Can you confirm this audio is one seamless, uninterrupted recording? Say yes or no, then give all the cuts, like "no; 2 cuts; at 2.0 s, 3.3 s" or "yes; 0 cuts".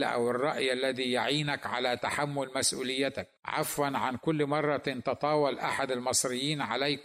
no; 1 cut; at 3.4 s